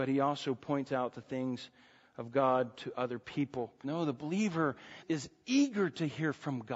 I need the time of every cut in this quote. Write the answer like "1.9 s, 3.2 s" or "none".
3.8 s, 5.0 s